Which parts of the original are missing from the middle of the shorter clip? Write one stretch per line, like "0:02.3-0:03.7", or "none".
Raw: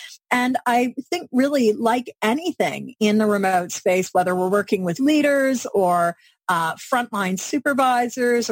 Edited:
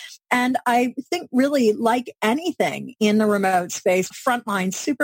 0:04.1-0:06.8